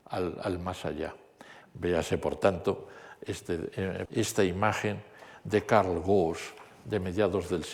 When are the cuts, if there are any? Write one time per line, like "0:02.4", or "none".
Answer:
0:01.6
0:04.1